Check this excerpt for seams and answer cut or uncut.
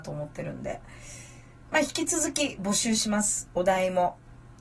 uncut